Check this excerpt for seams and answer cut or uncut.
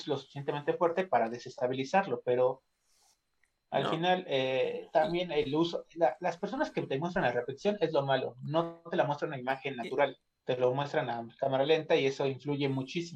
uncut